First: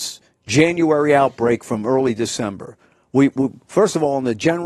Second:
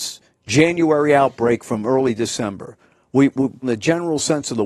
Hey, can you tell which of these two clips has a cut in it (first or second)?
second